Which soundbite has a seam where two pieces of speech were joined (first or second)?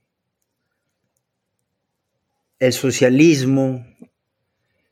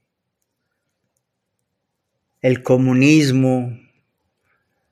second